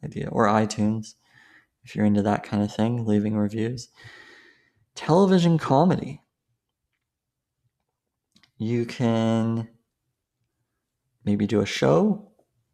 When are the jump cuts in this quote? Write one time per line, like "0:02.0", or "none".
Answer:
none